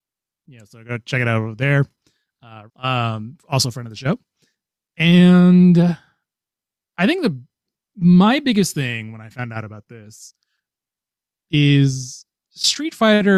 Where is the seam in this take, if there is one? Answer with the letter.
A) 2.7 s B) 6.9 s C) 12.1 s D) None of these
A